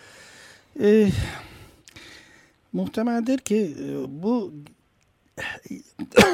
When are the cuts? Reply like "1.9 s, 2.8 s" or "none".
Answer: 2.6 s